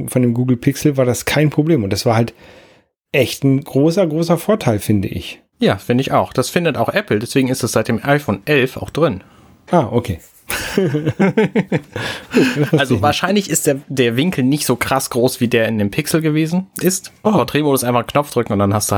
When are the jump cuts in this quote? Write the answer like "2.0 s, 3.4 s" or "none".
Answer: 17.2 s

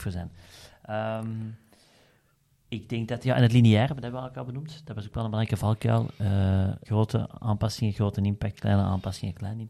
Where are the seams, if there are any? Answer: 6.8 s

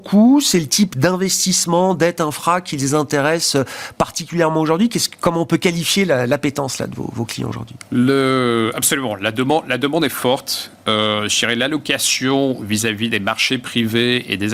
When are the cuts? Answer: none

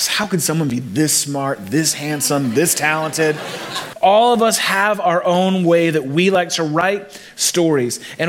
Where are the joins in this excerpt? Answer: 3.9 s

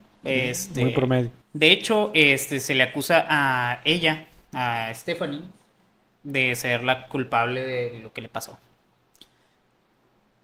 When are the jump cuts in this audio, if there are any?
1.4 s

